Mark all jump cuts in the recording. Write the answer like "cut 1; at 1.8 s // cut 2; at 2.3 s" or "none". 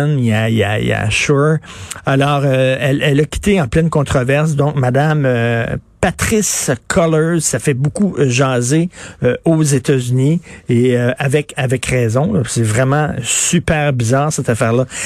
none